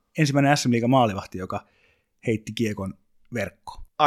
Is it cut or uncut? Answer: uncut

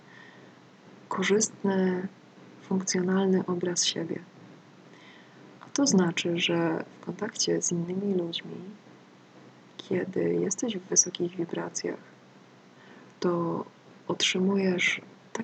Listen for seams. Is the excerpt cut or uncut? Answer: uncut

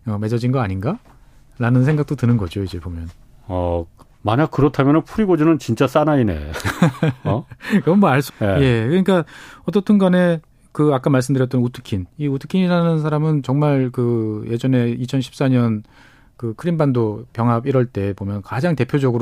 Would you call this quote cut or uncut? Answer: cut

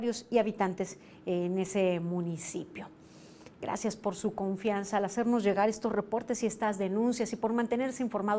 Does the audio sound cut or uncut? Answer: uncut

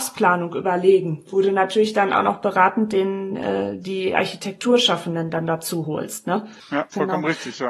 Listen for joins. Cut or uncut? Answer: uncut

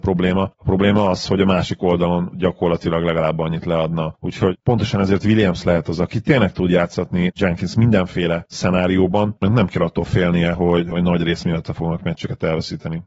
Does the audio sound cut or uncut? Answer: uncut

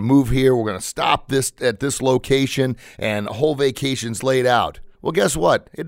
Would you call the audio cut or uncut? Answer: cut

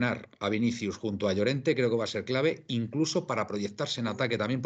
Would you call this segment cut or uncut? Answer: uncut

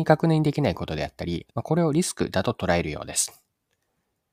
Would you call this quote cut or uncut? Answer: cut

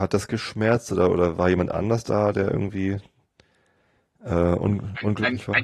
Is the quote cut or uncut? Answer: uncut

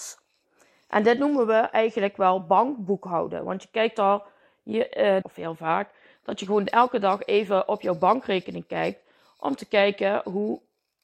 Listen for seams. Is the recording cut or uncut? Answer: cut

